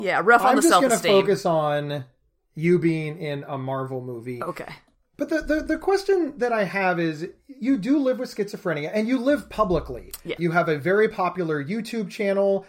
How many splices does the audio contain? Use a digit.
1